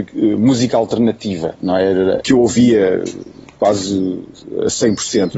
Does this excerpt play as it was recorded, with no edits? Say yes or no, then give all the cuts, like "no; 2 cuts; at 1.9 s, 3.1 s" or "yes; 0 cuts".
no; 1 cut; at 2.2 s